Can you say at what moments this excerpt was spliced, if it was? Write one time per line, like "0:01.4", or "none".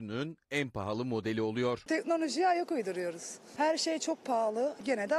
0:01.9